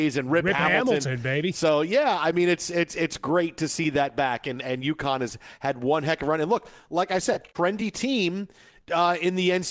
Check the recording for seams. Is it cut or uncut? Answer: uncut